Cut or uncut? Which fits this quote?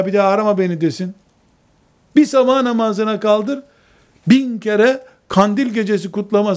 uncut